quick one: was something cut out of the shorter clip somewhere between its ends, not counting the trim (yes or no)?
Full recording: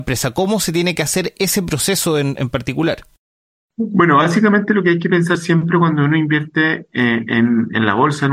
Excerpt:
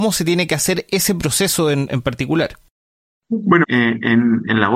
yes